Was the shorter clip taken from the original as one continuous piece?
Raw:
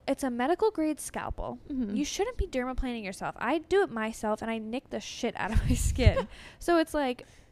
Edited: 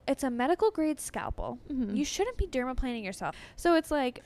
no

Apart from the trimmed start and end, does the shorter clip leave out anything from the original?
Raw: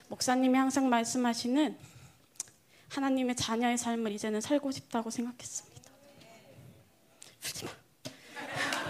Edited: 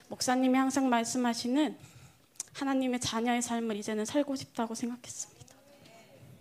yes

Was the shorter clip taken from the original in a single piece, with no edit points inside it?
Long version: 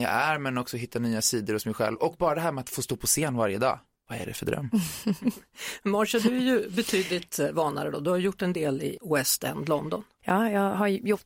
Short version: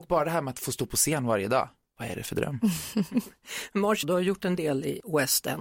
no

